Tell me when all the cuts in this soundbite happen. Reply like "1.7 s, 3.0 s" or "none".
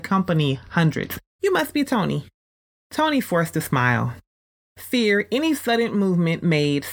1.4 s